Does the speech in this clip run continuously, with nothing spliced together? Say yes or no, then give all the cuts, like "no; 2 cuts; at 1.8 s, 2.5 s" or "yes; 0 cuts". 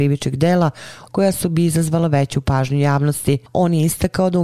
no; 1 cut; at 1.1 s